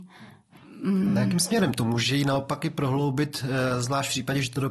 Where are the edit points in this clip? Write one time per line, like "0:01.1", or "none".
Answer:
none